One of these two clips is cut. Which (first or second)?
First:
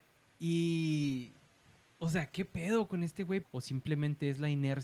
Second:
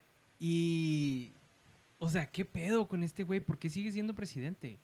first